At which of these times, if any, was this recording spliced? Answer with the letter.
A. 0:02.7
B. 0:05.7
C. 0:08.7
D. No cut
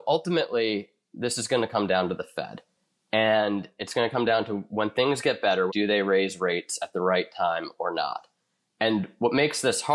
B